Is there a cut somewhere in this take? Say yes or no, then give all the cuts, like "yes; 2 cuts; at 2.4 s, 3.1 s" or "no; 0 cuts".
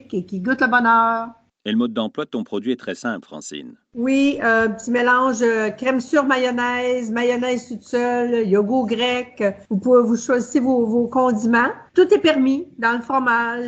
no; 0 cuts